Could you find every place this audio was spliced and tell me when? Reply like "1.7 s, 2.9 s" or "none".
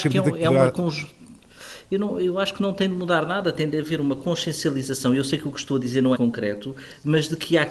6.1 s